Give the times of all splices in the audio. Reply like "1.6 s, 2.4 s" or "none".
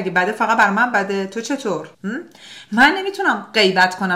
1.9 s